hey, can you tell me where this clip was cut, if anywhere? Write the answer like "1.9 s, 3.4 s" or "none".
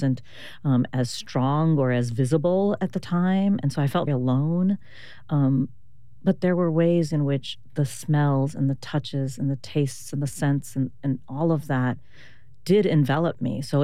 4.1 s